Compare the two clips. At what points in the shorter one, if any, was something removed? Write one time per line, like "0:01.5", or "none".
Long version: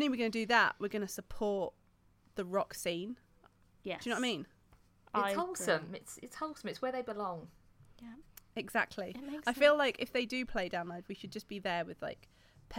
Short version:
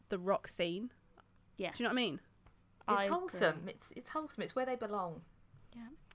none